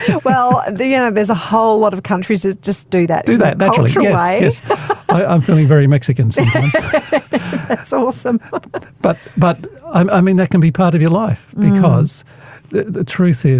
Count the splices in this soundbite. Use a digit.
0